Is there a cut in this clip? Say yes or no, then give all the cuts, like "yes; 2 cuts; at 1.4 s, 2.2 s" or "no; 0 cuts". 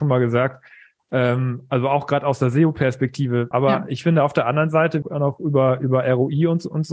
yes; 2 cuts; at 3.5 s, 5.0 s